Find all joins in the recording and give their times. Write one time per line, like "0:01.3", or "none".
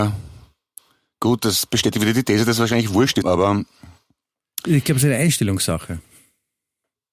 0:03.2